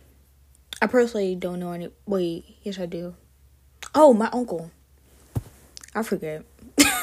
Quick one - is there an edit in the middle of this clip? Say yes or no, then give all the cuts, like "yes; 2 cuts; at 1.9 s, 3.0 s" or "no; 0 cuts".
no; 0 cuts